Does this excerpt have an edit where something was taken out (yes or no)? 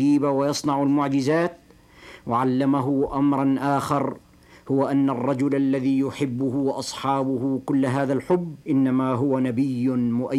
yes